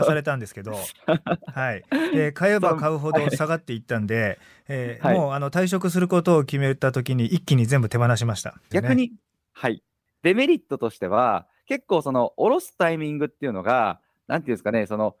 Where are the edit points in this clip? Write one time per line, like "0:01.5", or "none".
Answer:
0:08.7